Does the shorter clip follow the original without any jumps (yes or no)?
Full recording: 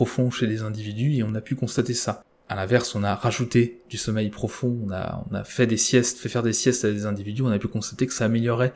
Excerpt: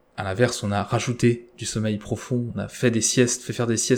no